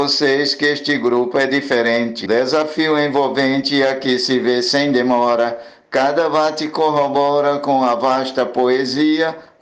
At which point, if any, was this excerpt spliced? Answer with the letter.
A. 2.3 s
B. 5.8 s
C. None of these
A